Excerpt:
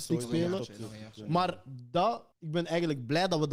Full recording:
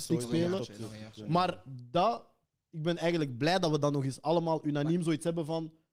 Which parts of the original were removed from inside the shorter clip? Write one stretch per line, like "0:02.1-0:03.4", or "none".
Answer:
0:02.3-0:02.6